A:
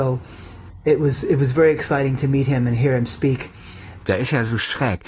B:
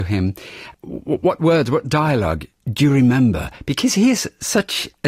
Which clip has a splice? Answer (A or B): A